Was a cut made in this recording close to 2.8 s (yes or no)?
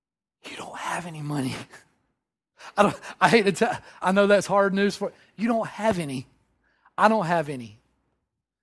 no